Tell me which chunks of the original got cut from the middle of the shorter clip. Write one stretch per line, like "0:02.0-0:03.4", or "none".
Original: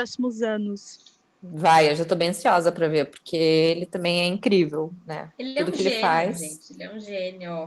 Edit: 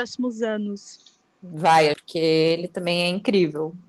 0:01.9-0:03.1